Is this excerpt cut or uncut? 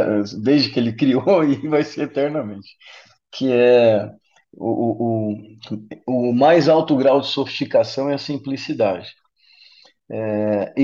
uncut